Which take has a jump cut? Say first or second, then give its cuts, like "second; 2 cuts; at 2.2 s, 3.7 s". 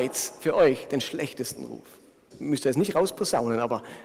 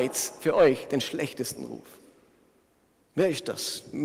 first; 1 cut; at 2.3 s